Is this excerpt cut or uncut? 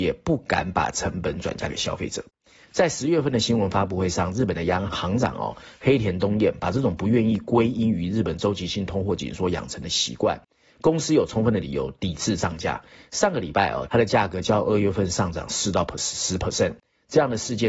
cut